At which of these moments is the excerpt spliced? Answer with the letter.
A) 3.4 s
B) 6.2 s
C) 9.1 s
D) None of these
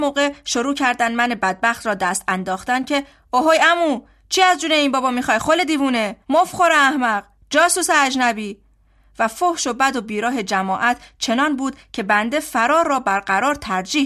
B